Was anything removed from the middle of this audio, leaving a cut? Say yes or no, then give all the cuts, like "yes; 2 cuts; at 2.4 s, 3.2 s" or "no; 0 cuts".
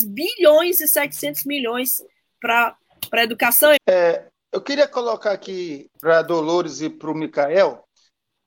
yes; 2 cuts; at 3.8 s, 5.9 s